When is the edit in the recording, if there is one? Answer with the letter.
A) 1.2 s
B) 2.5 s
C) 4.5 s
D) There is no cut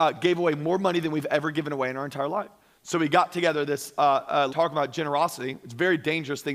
C